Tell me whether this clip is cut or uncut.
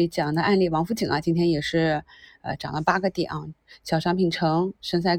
uncut